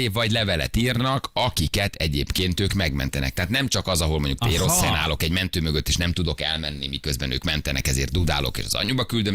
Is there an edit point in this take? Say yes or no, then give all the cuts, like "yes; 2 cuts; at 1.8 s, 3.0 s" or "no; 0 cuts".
no; 0 cuts